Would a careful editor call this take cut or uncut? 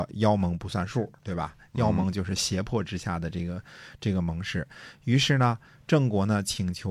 uncut